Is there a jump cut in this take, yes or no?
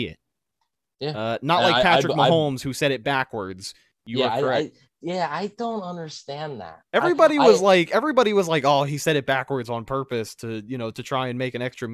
no